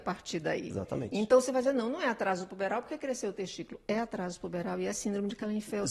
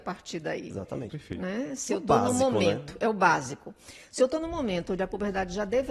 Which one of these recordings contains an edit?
second; 1 cut; at 1.1 s

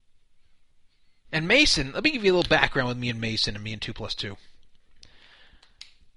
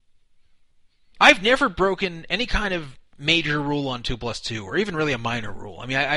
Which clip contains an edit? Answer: second; 1 cut; at 1.1 s

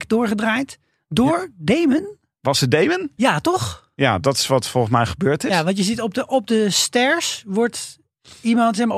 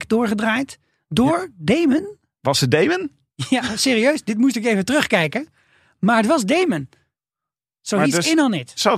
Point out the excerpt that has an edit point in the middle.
first; 1 cut; at 3.2 s

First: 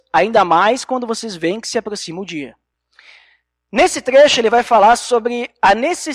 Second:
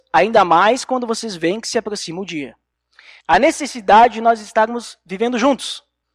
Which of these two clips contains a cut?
second; 1 cut; at 3.2 s

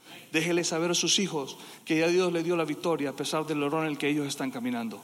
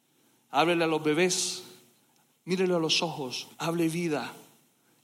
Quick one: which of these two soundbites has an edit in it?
second; 1 cut; at 3.5 s

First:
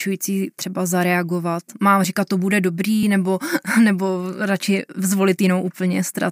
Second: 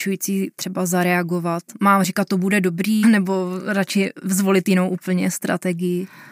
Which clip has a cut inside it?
second; 1 cut; at 3.0 s

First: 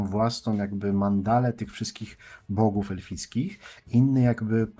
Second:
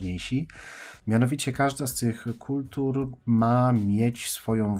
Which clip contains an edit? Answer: second; 1 cut; at 1.0 s

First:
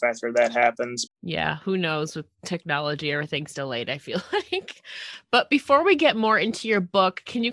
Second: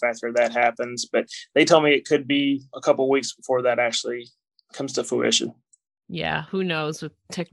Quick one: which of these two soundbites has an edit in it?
first; 1 cut; at 1.1 s

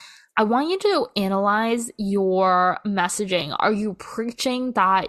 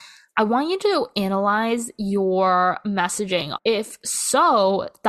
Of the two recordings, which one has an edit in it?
second; 1 cut; at 3.6 s

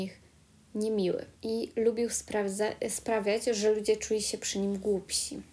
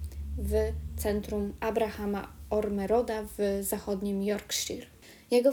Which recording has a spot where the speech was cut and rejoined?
first; 1 cut; at 1.3 s

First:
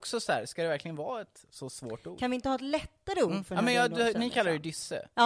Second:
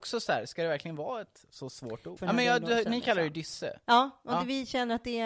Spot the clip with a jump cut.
second; 1 cut; at 2.2 s

